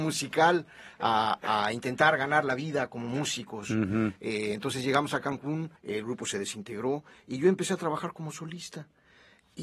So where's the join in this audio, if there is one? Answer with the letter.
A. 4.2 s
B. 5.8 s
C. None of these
B